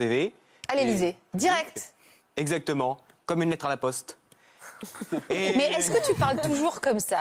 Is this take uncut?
no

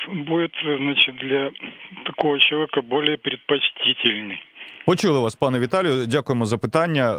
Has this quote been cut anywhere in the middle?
no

